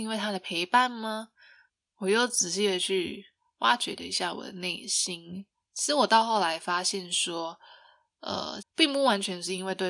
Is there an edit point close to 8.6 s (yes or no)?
yes